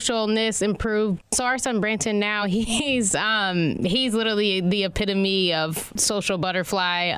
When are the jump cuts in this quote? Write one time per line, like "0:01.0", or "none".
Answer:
none